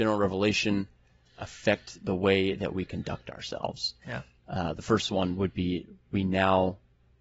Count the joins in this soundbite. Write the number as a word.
zero